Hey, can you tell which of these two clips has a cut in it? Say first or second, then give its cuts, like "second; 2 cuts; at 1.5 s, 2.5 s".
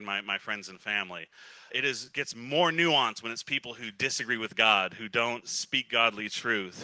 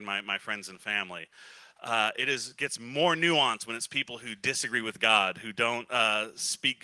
first; 2 cuts; at 1.7 s, 5.4 s